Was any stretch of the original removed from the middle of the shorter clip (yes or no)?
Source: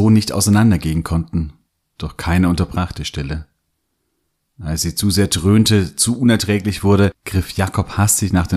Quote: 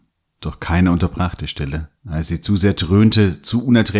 yes